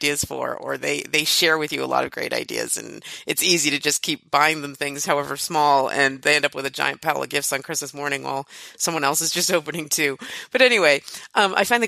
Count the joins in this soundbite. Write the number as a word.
zero